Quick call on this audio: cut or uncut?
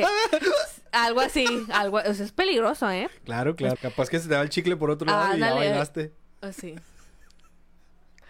cut